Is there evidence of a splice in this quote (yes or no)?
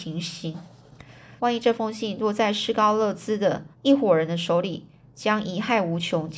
yes